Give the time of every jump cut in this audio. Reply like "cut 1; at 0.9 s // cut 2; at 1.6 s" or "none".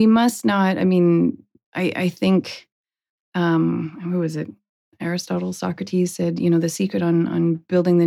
none